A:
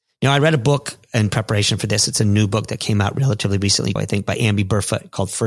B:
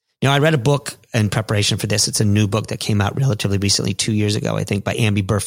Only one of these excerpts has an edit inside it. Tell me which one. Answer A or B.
A